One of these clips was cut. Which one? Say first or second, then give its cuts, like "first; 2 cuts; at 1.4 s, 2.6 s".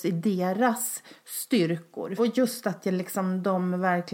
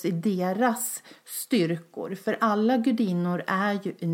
first; 1 cut; at 2.2 s